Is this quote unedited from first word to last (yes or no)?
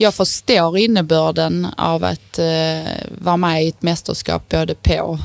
yes